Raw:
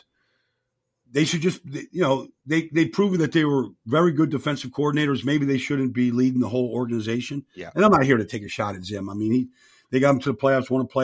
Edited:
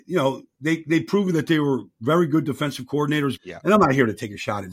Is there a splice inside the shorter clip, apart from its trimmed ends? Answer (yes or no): yes